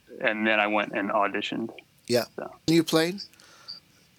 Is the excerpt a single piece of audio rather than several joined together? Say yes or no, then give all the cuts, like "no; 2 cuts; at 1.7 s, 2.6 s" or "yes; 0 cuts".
no; 1 cut; at 2.7 s